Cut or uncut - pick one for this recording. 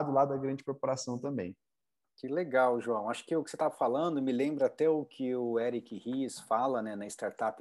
uncut